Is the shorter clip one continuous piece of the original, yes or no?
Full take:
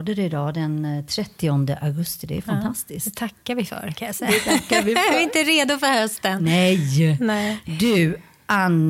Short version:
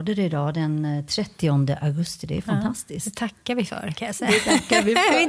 yes